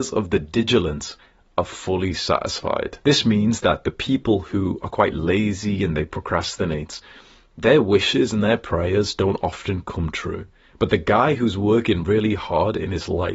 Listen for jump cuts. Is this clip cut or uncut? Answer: uncut